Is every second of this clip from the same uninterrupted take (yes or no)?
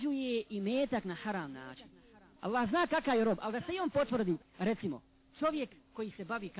no